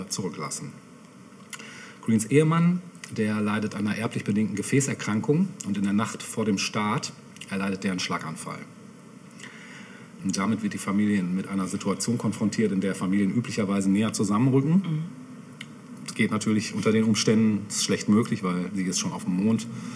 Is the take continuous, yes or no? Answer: no